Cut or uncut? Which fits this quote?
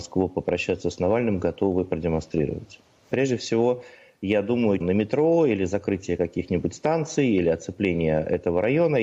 cut